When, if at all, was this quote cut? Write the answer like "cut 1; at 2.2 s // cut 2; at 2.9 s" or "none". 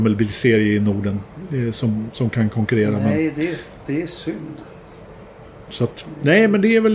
cut 1; at 5.7 s